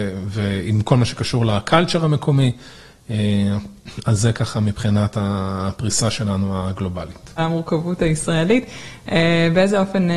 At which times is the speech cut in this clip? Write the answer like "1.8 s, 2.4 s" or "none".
7.4 s